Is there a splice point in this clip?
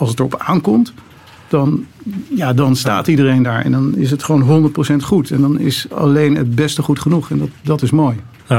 no; 0 cuts

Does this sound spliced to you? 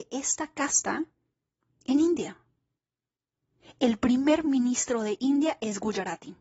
no; 0 cuts

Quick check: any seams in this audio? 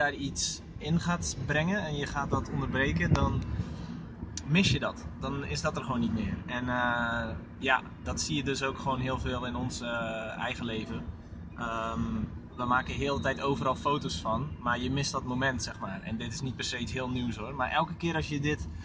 no; 0 cuts

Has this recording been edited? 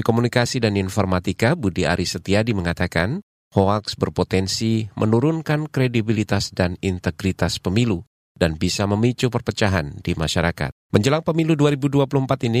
yes; 1 cut; at 10.9 s

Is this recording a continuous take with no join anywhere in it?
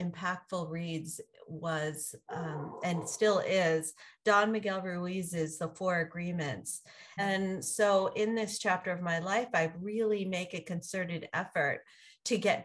no; 1 cut; at 7.2 s

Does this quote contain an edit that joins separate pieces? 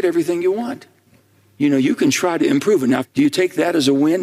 yes; 1 cut; at 3.0 s

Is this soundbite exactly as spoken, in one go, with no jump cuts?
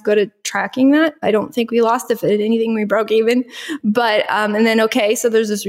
yes; 0 cuts

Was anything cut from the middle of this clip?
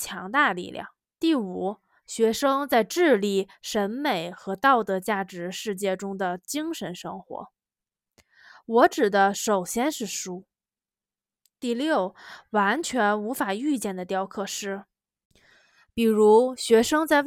yes; 1 cut; at 1.2 s

